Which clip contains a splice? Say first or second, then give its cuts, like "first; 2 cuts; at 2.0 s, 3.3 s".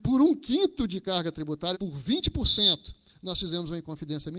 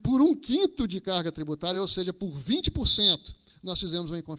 first; 1 cut; at 1.7 s